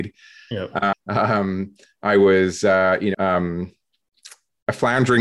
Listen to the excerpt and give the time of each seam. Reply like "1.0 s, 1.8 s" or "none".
0.9 s, 3.1 s